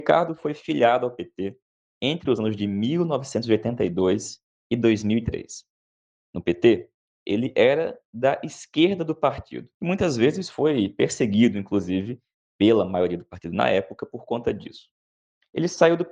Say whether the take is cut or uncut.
cut